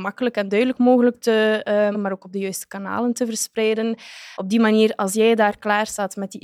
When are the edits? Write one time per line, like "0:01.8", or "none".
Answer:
0:01.9
0:04.4